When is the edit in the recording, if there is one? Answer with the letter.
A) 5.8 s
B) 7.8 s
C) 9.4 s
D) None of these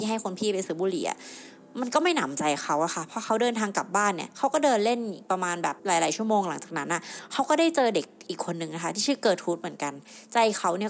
A